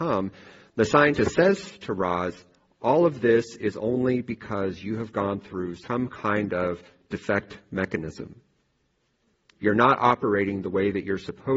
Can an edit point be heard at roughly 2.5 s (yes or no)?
no